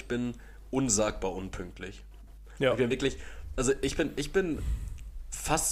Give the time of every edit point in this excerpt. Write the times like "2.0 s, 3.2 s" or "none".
none